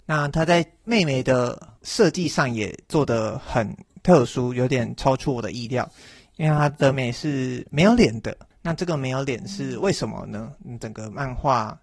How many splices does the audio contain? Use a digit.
1